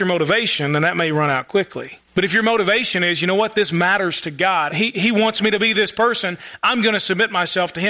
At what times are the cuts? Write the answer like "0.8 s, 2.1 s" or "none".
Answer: 2.1 s, 4.7 s